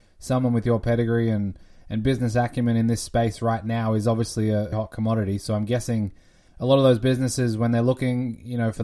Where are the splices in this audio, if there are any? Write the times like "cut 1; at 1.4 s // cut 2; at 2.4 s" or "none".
cut 1; at 4.7 s